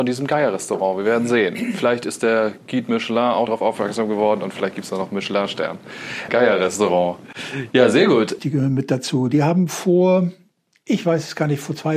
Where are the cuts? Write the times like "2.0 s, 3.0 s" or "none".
3.5 s, 6.3 s, 8.4 s